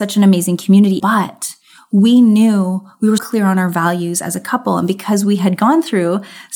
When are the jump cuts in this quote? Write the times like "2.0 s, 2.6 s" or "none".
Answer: 1.0 s, 3.2 s